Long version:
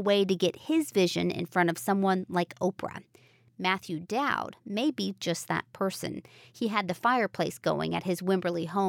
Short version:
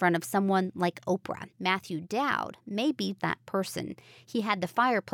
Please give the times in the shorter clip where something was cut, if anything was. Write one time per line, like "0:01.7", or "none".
0:01.5
0:03.2